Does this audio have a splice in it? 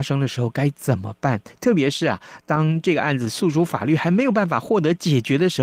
no; 0 cuts

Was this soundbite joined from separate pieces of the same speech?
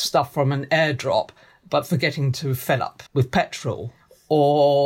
yes; 1 cut; at 3.1 s

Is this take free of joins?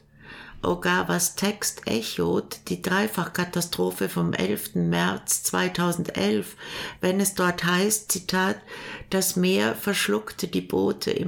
yes; 0 cuts

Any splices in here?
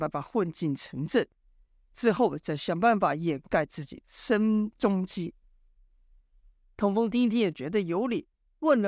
yes; 1 cut; at 4.0 s

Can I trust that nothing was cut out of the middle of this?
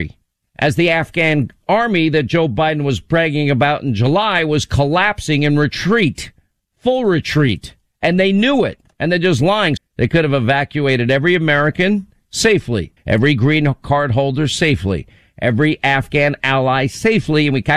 no; 2 cuts; at 9.8 s, 13.0 s

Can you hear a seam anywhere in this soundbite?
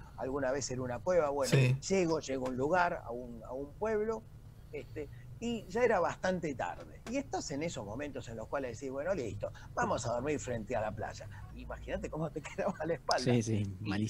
yes; 2 cuts; at 1.8 s, 11.5 s

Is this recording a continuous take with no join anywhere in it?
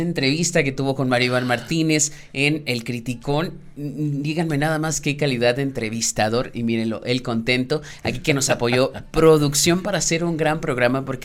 yes; 0 cuts

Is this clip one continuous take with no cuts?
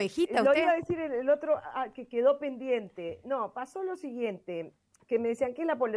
yes; 0 cuts

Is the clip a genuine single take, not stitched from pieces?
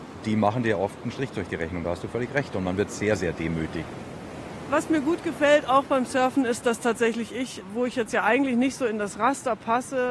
yes; 0 cuts

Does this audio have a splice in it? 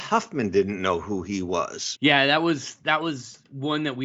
yes; 1 cut; at 1.9 s

